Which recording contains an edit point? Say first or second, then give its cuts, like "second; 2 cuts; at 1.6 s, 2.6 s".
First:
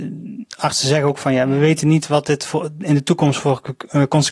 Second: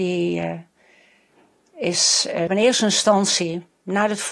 second; 1 cut; at 2.5 s